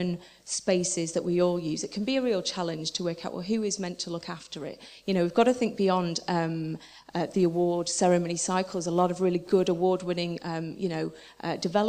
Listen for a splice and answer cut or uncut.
cut